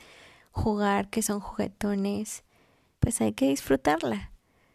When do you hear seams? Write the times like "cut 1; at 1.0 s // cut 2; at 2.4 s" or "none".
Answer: cut 1; at 2.9 s

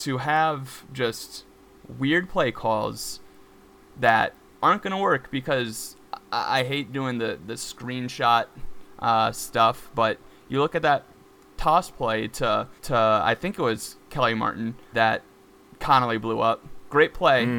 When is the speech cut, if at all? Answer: cut 1; at 12.8 s // cut 2; at 14.9 s

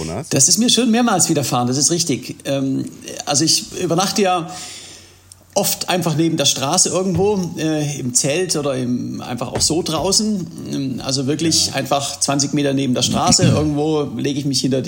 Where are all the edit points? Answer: none

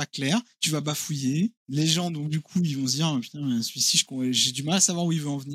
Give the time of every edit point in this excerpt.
cut 1; at 1.6 s

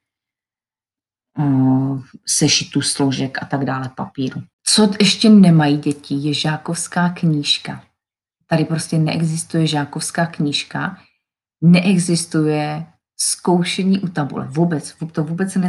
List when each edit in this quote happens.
none

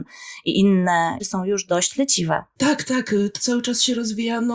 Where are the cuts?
cut 1; at 1.2 s

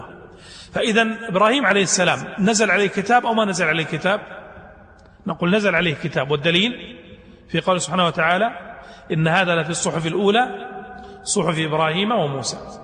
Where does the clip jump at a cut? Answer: none

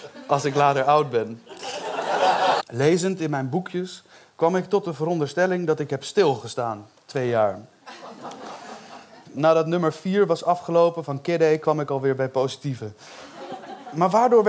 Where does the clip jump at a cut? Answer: cut 1; at 2.6 s // cut 2; at 9.3 s

